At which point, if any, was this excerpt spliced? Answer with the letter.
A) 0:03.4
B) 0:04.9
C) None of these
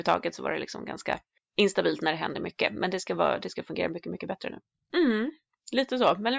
B